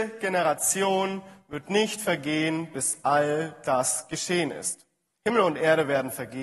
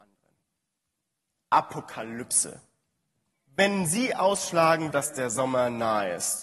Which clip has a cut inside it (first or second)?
second